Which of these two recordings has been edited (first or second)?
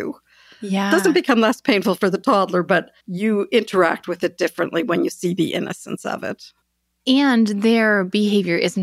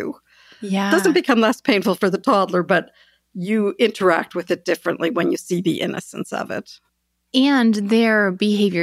first